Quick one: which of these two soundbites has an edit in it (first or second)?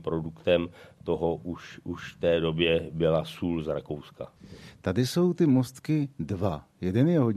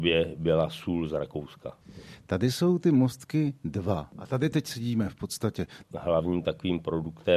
second